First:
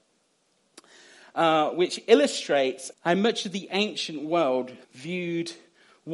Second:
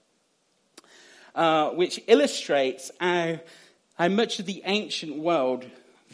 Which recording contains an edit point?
first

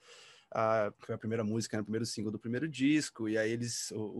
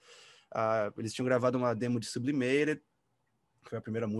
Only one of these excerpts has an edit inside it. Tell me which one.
first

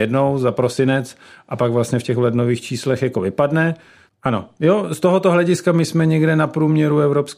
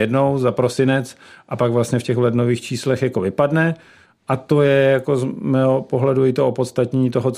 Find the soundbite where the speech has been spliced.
first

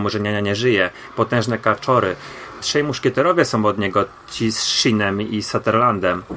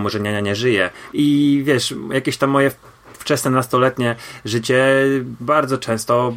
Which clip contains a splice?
second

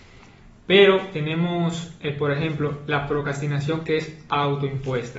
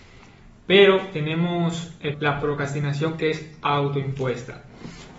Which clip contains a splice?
second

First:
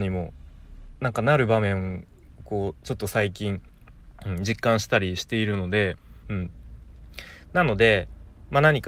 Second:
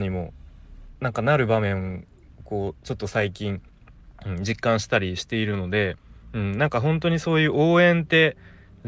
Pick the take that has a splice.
first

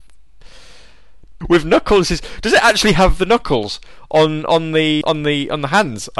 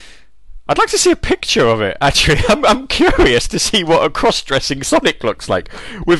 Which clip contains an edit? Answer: first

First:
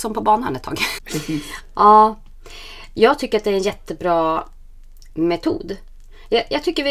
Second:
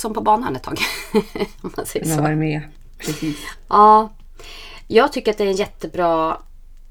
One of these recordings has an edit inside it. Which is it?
first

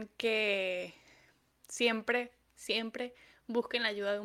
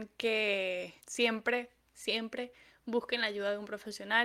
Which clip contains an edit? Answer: second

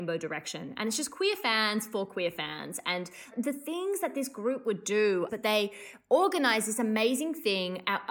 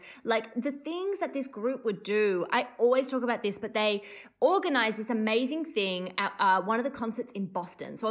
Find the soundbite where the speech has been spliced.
first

